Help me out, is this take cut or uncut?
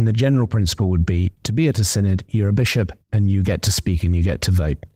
cut